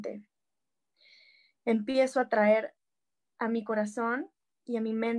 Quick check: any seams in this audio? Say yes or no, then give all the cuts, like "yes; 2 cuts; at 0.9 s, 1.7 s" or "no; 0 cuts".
no; 0 cuts